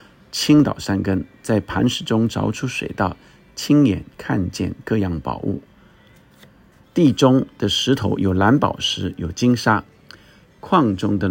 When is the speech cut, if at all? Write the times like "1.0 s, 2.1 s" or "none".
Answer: 6.8 s